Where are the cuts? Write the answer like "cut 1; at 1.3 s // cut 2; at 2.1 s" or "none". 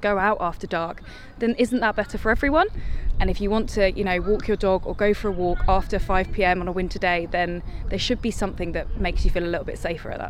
cut 1; at 3.1 s